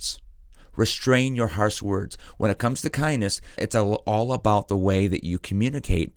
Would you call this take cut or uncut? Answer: cut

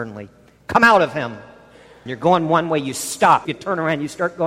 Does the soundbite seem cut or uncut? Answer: cut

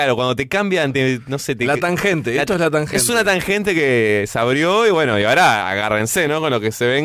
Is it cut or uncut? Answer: uncut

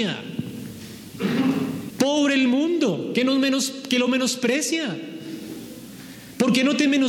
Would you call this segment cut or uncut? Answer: cut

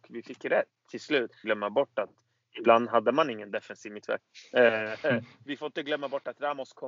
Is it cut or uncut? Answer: cut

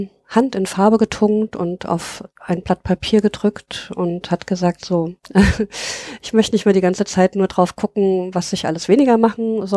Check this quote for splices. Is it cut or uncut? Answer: uncut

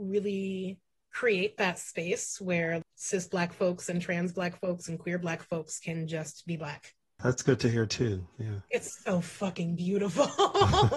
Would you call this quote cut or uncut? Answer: uncut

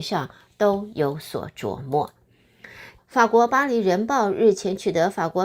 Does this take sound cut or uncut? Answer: cut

